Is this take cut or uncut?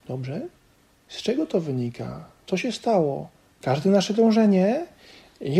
cut